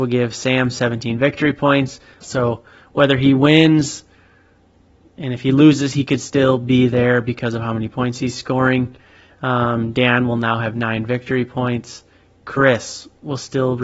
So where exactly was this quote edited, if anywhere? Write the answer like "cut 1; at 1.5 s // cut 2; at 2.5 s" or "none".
cut 1; at 2.2 s // cut 2; at 9.3 s